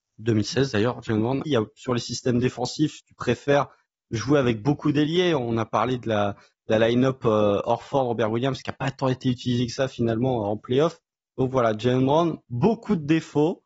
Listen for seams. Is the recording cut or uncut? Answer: cut